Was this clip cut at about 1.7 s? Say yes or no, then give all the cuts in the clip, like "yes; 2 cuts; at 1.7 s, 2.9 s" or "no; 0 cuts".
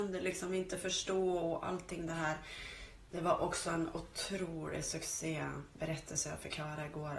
no; 1 cut; at 3.1 s